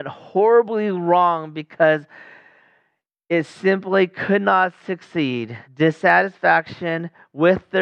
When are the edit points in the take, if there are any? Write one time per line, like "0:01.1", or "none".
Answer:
0:05.6